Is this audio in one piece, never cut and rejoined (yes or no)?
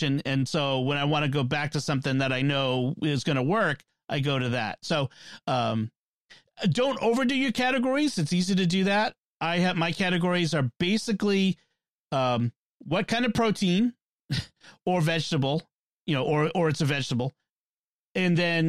yes